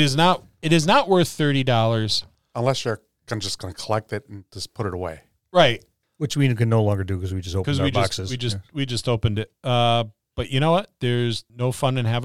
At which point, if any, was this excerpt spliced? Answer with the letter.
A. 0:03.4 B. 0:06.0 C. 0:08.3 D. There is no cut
D